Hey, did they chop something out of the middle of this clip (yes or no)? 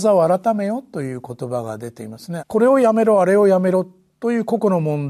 yes